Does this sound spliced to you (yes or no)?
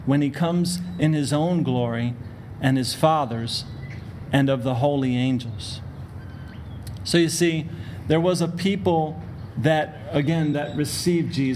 no